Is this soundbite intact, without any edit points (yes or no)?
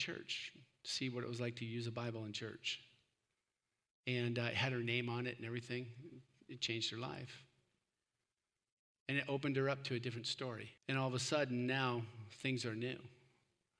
no